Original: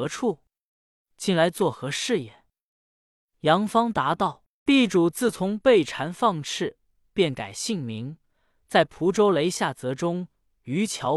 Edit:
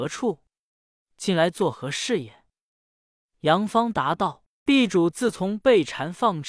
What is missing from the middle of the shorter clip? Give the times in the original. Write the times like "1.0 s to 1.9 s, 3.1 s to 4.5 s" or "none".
none